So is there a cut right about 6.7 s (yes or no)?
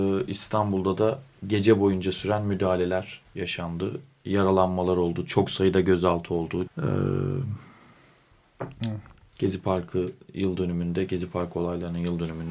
yes